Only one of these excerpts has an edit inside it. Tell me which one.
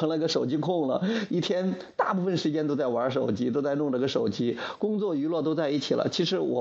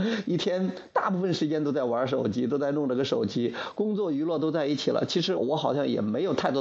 second; 1 cut; at 5.4 s

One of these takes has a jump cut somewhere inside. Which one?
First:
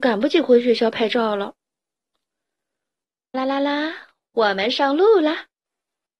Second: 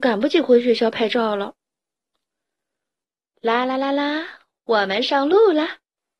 first; 1 cut; at 3.3 s

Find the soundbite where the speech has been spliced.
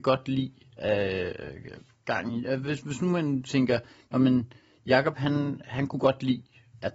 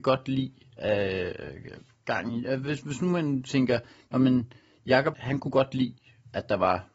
second; 1 cut; at 5.1 s

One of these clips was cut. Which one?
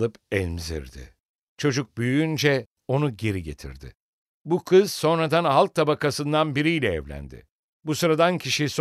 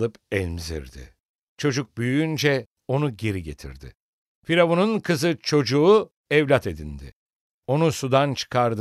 first; 1 cut; at 4.3 s

